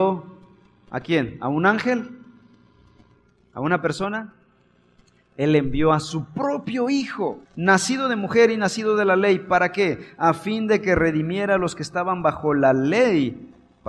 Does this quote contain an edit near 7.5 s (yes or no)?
yes